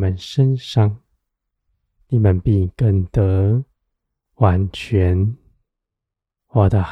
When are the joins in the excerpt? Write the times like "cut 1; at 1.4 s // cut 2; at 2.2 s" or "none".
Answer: none